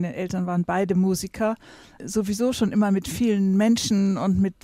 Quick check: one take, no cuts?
yes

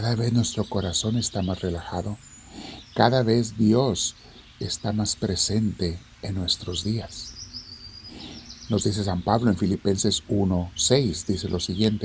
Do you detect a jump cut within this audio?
no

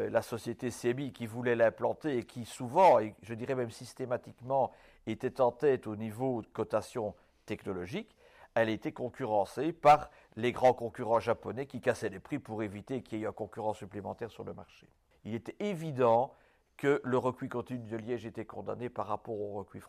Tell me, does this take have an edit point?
yes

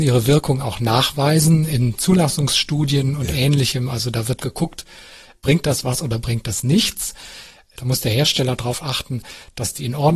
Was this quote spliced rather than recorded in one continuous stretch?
yes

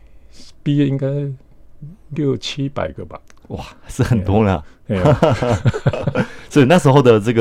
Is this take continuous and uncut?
yes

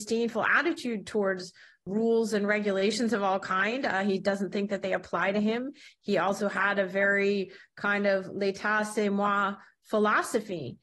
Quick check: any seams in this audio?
no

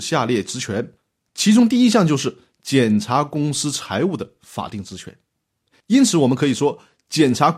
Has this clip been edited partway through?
no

